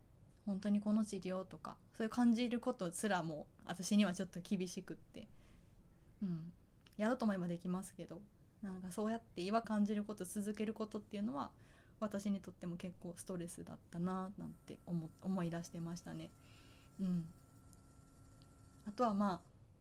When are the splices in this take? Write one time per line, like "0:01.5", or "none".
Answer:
0:09.6